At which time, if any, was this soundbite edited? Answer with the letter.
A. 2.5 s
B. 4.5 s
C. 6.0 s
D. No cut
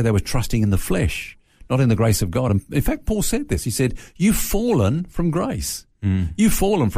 D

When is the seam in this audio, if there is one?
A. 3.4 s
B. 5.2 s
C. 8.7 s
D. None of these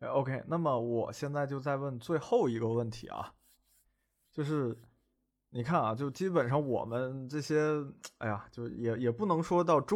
D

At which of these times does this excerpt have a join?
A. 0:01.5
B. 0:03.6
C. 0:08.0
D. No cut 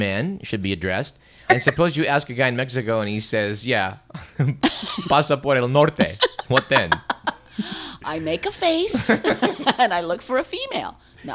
A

